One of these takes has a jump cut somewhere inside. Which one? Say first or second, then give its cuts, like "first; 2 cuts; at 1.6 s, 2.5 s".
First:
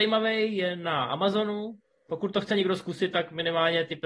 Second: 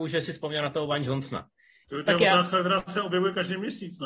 second; 1 cut; at 1.8 s